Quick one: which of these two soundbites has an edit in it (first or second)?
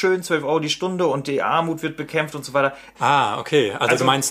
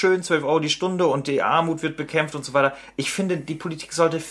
first